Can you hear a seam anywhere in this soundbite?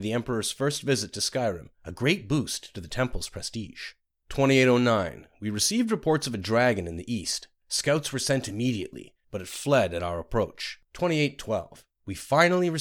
yes; 2 cuts; at 9.2 s, 10.8 s

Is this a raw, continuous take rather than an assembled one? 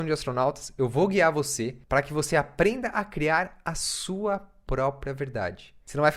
yes; 0 cuts

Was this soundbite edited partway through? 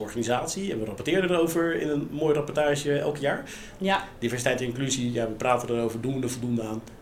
yes; 1 cut; at 3.8 s

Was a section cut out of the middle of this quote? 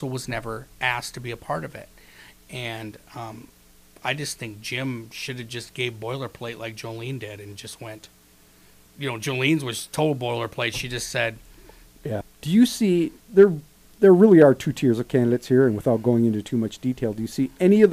yes; 1 cut; at 12.2 s

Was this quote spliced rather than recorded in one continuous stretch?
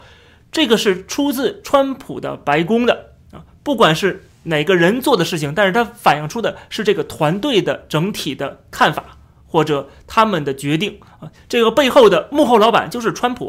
no; 0 cuts

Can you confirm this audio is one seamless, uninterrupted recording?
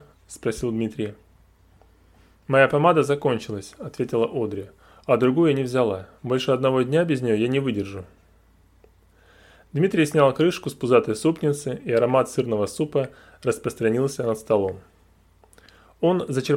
yes; 0 cuts

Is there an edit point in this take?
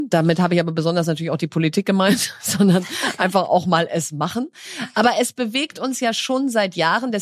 no; 0 cuts

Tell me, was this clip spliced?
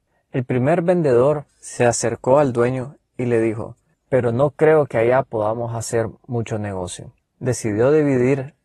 yes; 2 cuts; at 4.0 s, 7.2 s

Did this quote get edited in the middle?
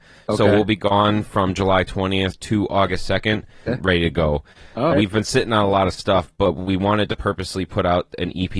yes; 2 cuts; at 3.7 s, 4.9 s

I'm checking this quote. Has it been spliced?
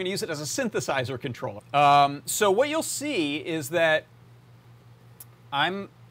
yes; 1 cut; at 1.6 s

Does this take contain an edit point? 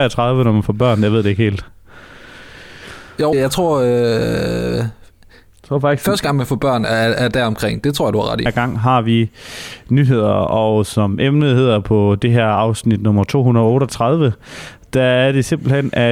yes; 2 cuts; at 3.3 s, 8.5 s

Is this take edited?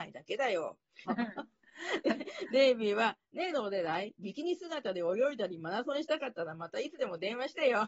yes; 1 cut; at 1.1 s

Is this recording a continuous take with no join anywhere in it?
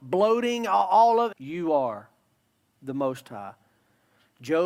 no; 1 cut; at 1.3 s

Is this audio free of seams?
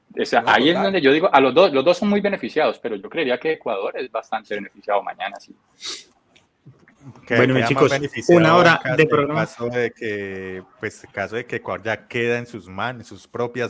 yes; 0 cuts

